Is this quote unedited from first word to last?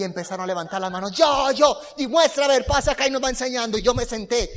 yes; 0 cuts

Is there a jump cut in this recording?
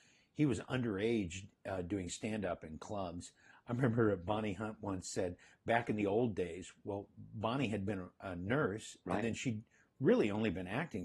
no; 0 cuts

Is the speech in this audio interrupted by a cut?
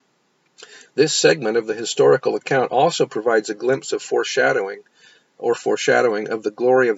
no; 0 cuts

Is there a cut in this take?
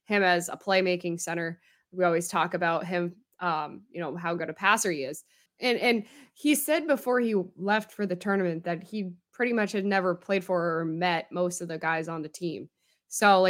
yes; 1 cut; at 5.5 s

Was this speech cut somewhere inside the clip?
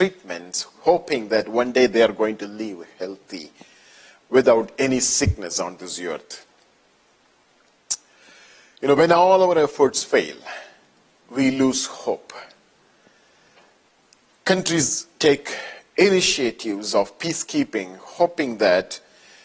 yes; 1 cut; at 14.3 s

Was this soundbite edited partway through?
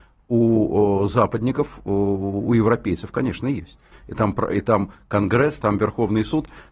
yes; 2 cuts; at 3.9 s, 5.6 s

